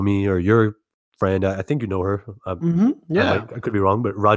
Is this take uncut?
yes; 0 cuts

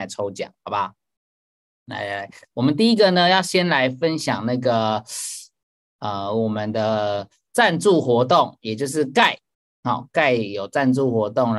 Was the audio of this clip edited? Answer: no; 0 cuts

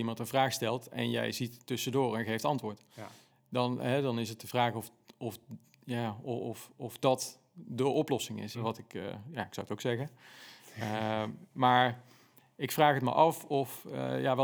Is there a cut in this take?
yes; 1 cut; at 8.5 s

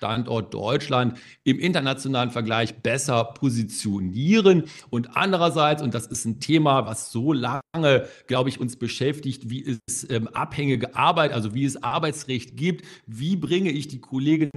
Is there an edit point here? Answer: no; 0 cuts

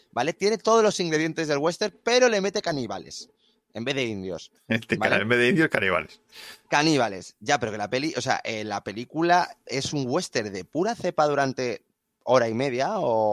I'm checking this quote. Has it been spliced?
no; 0 cuts

